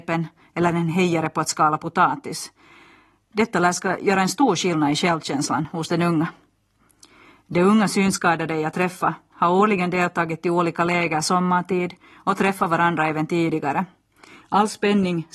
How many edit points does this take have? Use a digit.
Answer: 1